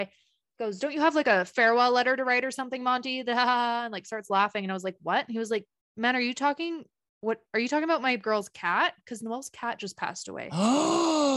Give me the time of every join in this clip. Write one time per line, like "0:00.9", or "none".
none